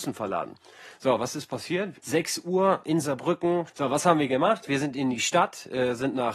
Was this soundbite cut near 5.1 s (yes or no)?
no